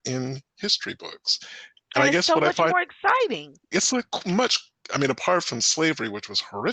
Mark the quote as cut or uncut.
cut